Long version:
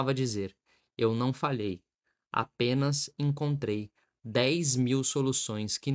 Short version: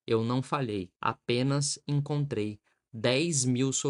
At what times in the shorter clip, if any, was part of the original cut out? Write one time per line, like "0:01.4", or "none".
0:00.9